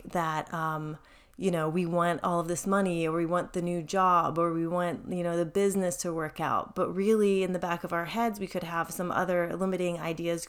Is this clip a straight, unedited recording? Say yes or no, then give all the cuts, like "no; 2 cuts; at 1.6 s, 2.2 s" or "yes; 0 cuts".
yes; 0 cuts